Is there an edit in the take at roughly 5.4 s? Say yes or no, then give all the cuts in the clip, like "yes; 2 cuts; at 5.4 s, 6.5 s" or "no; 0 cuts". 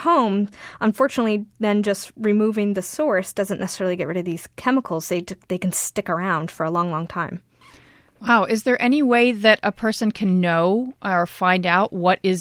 no; 0 cuts